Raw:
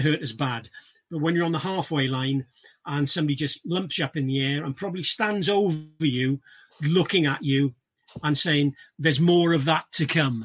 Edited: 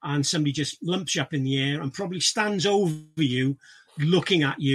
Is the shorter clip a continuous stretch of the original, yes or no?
yes